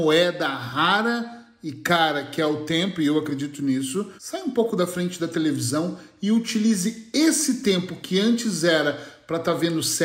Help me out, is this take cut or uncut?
cut